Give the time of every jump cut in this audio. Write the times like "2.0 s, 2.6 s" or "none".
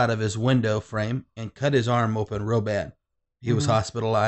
none